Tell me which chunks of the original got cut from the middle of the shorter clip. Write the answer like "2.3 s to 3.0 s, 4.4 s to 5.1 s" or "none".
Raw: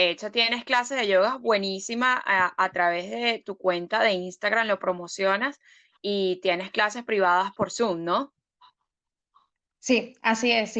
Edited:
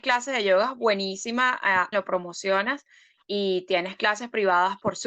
2.6 s to 4.7 s

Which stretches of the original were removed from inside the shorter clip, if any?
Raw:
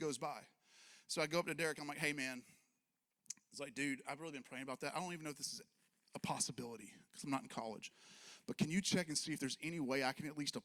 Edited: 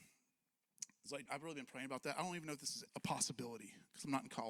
3.7 s to 4.0 s, 5.7 s to 6.1 s

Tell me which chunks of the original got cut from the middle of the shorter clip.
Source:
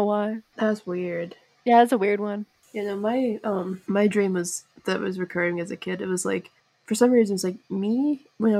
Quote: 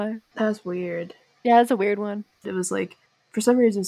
2.7 s to 6.0 s

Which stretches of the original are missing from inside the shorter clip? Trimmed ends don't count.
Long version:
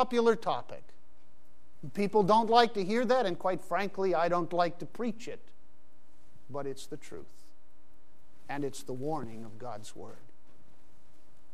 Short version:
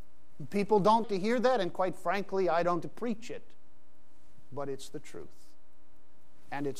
2.5 s to 2.7 s, 4.5 s to 4.8 s

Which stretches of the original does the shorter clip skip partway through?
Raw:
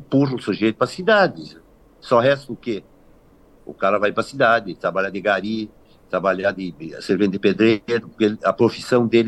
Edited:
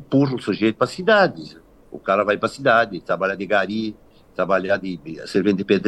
1.8 s to 3.5 s

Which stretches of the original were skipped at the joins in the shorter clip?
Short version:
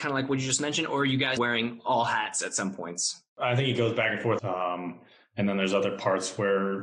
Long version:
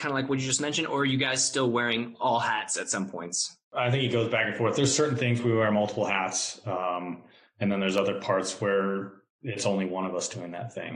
1.4 s to 1.7 s, 4.7 s to 6.6 s

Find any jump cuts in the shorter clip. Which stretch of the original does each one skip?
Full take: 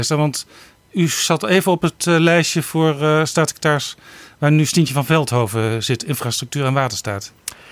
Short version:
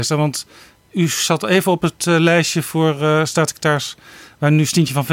none

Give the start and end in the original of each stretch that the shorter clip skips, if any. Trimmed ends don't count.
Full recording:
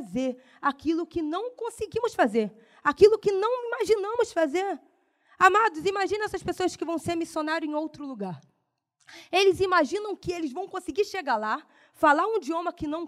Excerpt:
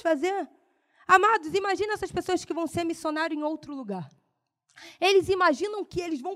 none

